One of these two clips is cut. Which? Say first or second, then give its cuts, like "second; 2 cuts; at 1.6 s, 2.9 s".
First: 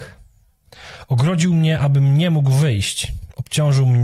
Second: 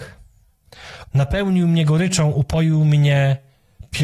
second; 1 cut; at 1.1 s